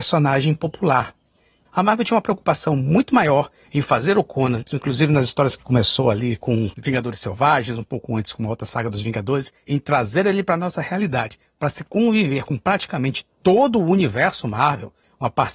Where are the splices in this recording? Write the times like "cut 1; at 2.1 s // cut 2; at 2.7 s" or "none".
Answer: cut 1; at 1.7 s

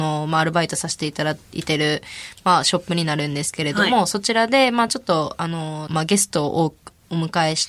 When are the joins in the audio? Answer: cut 1; at 5.9 s

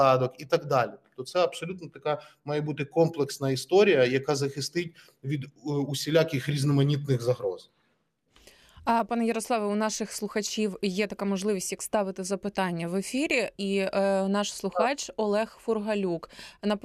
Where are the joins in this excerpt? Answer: none

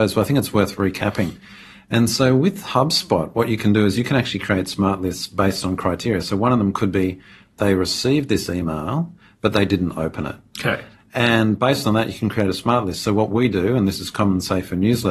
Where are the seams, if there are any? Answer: none

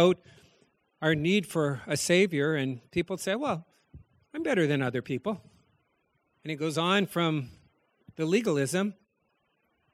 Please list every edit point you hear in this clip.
cut 1; at 6.3 s

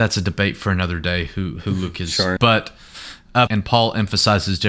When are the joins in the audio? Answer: cut 1; at 2.4 s // cut 2; at 3.5 s

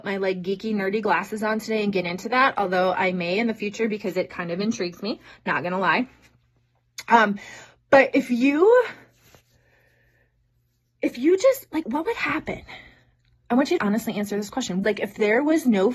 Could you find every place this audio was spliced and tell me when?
cut 1; at 11.8 s // cut 2; at 13.8 s // cut 3; at 14.8 s

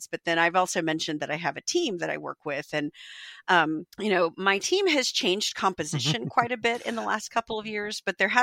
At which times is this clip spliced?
cut 1; at 3.9 s

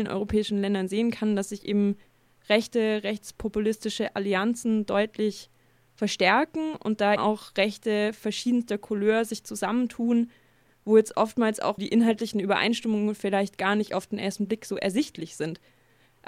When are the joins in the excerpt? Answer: cut 1; at 7.2 s // cut 2; at 11.8 s

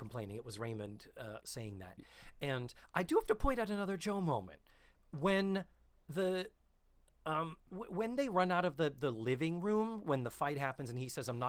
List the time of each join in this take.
none

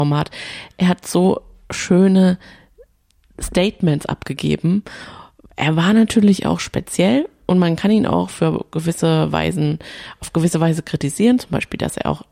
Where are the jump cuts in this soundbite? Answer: none

